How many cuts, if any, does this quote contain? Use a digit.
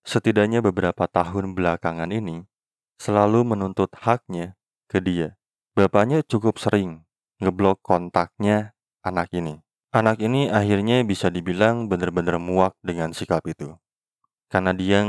2